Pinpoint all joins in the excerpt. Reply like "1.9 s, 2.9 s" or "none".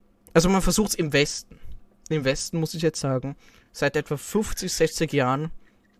none